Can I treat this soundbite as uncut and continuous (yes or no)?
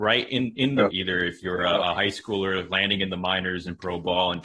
no